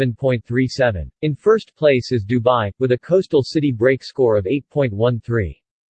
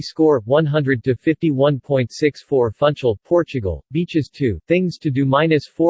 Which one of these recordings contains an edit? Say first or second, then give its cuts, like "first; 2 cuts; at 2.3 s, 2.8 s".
first; 2 cuts; at 1.2 s, 2.7 s